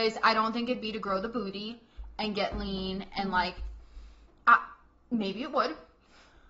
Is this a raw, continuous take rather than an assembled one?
yes; 0 cuts

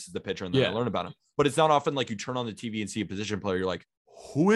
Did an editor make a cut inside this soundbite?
no; 0 cuts

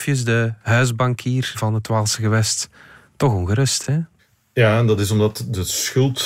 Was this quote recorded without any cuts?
yes; 0 cuts

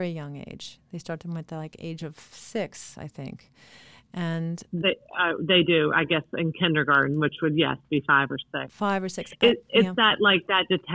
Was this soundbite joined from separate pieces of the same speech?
no; 0 cuts

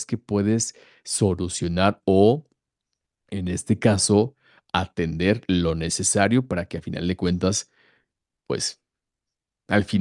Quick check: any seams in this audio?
no; 0 cuts

